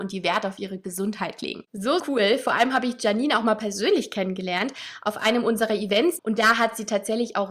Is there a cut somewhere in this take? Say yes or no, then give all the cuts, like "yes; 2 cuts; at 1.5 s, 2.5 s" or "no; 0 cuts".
yes; 2 cuts; at 2.0 s, 6.2 s